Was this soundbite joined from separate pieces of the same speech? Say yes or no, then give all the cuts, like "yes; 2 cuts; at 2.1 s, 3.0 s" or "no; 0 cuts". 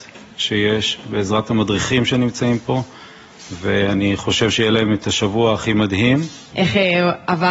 yes; 1 cut; at 6.5 s